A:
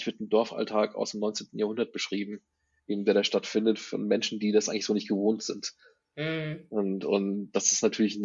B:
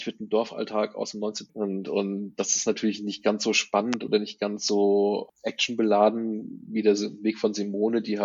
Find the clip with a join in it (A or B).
B